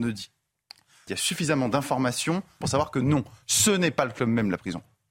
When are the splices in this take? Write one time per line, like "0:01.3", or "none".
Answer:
0:01.1
0:02.6